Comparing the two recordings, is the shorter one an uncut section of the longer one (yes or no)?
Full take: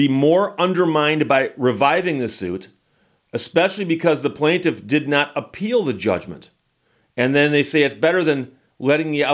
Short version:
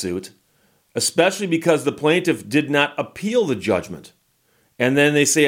yes